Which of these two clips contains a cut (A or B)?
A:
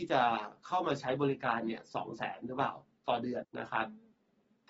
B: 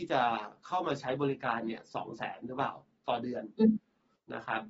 A